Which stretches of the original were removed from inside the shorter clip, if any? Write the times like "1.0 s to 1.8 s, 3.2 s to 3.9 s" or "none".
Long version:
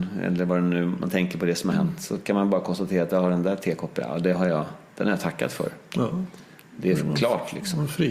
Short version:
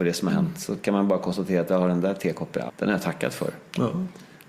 4.1 s to 4.9 s